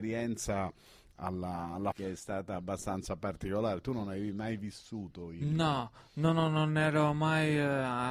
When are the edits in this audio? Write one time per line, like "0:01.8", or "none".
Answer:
0:01.9